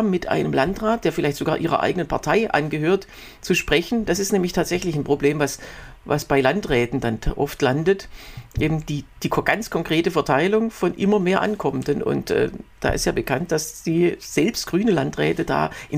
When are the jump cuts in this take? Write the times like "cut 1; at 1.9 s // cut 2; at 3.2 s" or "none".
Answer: none